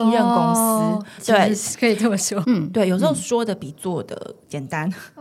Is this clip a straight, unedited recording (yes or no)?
no